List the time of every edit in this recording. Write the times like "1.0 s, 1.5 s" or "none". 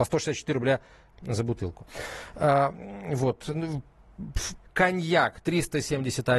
4.6 s